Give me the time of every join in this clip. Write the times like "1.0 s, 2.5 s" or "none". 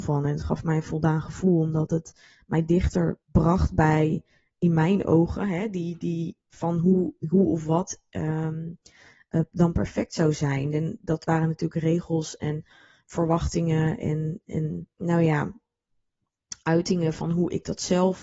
3.2 s, 14.9 s